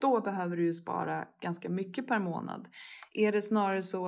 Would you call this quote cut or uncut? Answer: uncut